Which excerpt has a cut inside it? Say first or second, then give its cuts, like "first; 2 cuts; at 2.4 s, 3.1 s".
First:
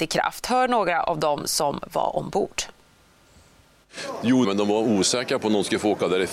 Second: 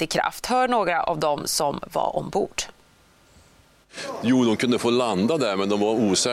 first; 1 cut; at 4.4 s